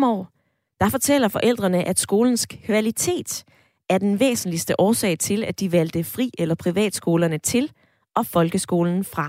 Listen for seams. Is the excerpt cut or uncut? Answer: uncut